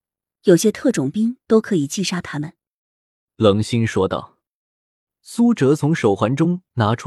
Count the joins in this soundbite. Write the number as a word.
zero